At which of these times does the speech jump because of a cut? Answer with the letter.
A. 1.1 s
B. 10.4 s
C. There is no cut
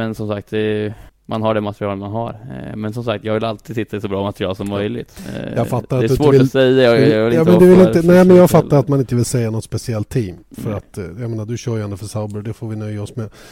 A